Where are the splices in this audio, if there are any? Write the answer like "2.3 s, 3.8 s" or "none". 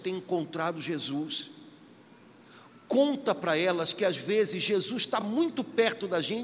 none

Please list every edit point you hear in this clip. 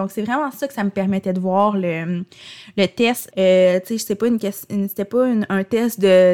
3.3 s

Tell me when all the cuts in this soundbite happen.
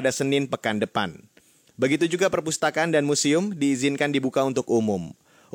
none

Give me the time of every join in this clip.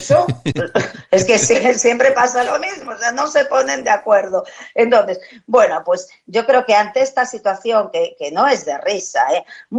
none

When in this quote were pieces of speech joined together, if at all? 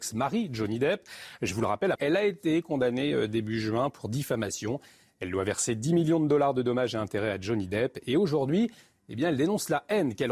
1.9 s

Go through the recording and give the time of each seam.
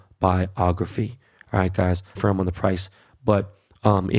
2.2 s

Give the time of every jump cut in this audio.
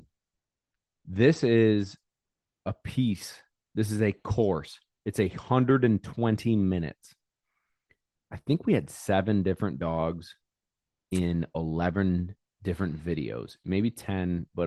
none

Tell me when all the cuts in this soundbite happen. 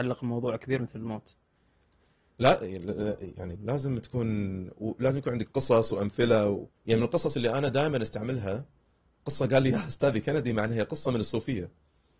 3.6 s, 6.8 s

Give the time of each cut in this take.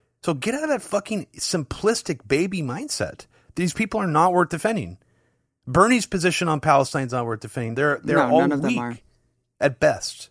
7.7 s

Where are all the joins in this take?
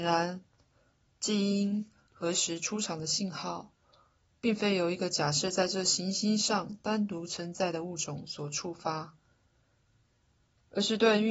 none

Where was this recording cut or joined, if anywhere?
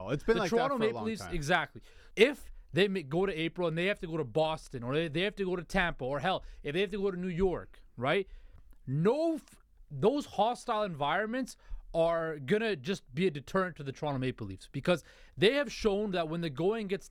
2.1 s

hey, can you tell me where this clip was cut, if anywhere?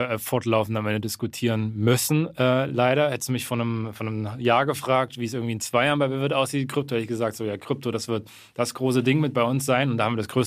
none

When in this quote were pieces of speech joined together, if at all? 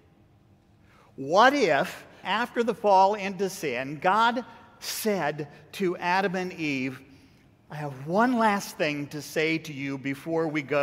2.2 s

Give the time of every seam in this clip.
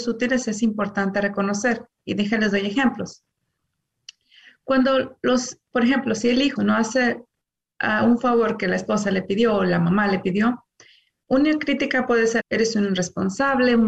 6.6 s, 12.4 s

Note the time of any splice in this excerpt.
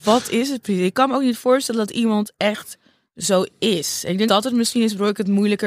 4.3 s

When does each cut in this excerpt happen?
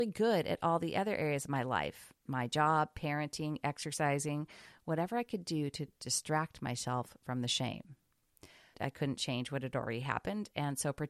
8.7 s

